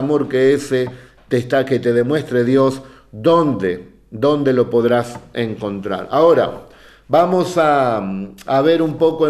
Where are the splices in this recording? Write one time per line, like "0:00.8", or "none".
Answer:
none